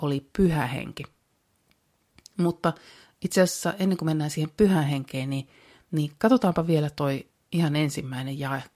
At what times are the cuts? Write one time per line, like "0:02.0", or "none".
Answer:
none